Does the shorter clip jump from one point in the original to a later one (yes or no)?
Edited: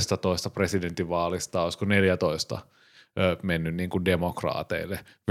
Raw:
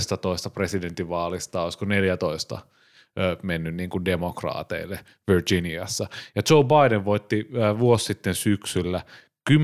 no